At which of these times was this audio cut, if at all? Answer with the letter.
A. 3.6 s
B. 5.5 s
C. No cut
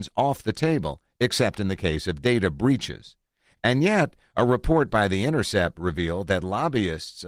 C